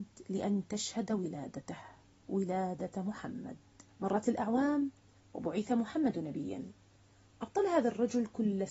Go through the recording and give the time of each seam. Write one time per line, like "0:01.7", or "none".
0:03.9